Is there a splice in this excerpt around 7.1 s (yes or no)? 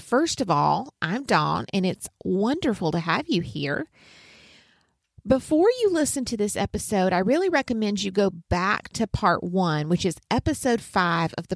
no